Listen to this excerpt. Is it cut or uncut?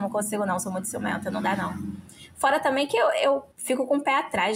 cut